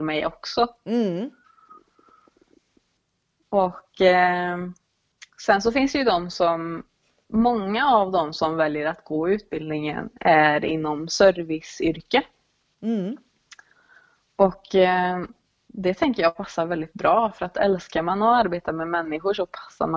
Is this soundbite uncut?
yes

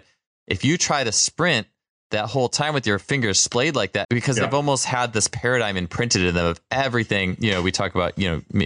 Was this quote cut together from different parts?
yes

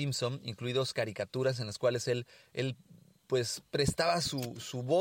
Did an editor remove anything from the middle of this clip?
no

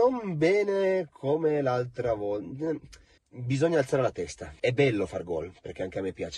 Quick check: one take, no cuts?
no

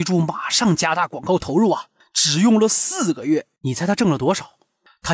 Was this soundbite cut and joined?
no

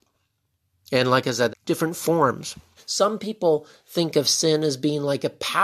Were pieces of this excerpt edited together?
yes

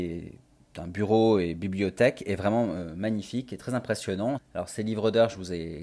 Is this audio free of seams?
no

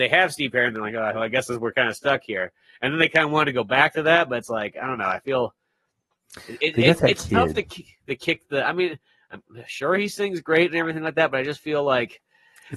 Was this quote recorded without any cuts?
no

